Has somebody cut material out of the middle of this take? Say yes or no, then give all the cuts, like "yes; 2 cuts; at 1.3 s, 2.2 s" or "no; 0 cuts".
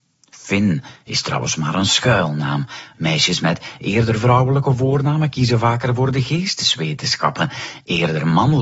yes; 1 cut; at 2.9 s